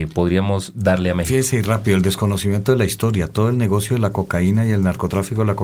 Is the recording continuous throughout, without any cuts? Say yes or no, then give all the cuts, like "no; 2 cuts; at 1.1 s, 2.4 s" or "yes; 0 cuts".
yes; 0 cuts